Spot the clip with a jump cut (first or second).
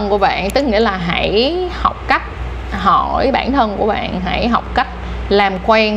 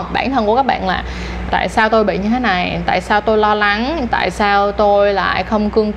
second